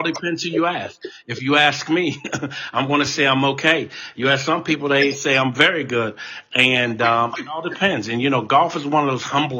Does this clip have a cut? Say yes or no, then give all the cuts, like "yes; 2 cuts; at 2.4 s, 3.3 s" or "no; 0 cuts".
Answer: no; 0 cuts